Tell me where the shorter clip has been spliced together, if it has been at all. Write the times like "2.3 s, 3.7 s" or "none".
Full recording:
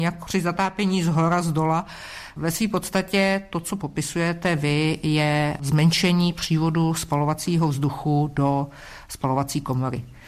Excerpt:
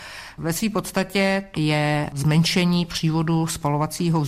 1.5 s